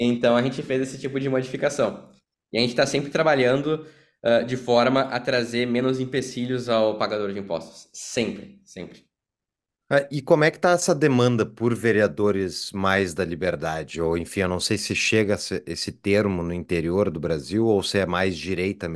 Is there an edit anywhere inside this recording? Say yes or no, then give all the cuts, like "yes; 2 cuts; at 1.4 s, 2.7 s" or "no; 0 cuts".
no; 0 cuts